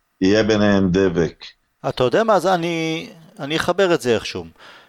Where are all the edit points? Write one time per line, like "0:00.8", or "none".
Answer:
0:01.8